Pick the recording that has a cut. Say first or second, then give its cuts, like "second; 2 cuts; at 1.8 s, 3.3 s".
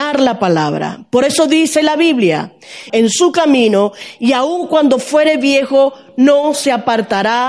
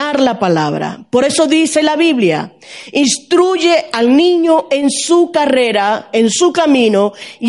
first; 1 cut; at 2.9 s